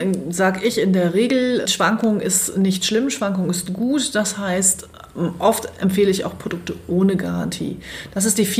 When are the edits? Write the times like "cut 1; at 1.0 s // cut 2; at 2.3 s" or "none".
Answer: cut 1; at 1.7 s